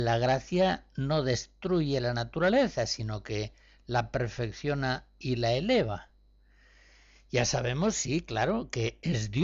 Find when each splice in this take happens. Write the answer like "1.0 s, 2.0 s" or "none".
none